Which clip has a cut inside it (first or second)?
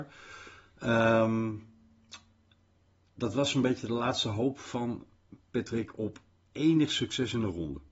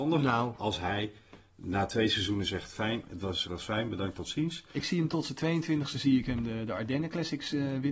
second